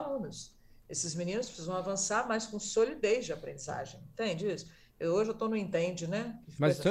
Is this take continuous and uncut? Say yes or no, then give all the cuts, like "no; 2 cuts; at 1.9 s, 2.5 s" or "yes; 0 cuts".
yes; 0 cuts